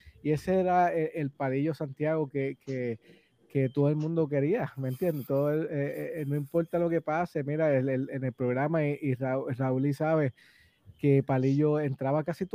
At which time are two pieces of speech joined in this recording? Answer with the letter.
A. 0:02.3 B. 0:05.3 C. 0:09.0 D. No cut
D